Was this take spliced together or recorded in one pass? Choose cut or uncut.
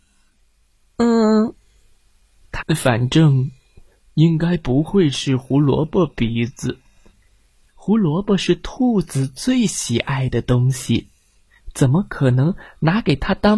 cut